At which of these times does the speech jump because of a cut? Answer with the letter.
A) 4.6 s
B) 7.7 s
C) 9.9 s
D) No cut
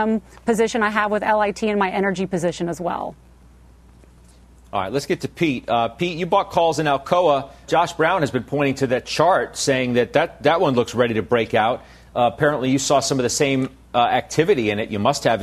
B